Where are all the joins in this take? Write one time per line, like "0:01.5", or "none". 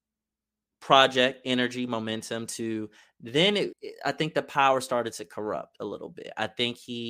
0:03.7